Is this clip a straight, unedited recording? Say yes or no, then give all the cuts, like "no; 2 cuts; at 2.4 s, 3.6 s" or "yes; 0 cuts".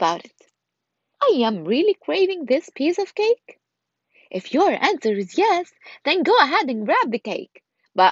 no; 1 cut; at 1.1 s